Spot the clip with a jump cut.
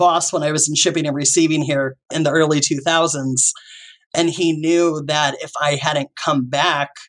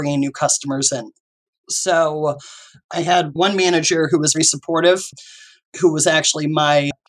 second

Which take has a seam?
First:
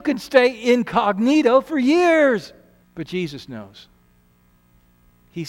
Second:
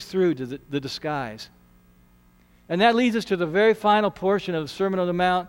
first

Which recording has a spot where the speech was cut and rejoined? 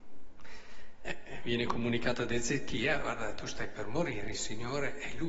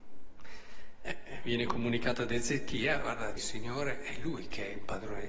second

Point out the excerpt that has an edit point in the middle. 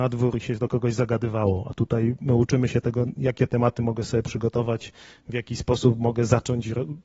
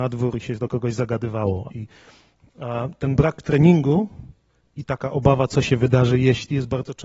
second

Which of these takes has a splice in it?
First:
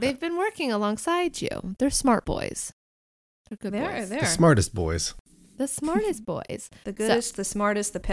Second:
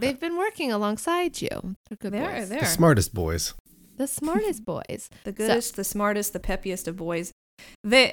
second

